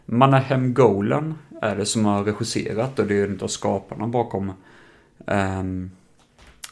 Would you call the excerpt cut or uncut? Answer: uncut